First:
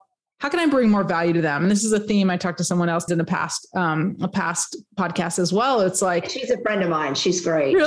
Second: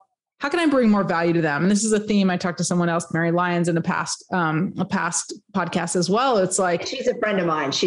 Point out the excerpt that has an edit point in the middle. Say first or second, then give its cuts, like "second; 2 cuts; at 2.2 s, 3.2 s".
first; 1 cut; at 3.1 s